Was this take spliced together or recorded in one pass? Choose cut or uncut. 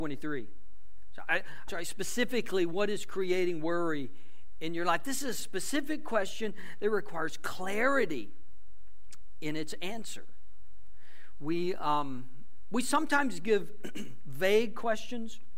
cut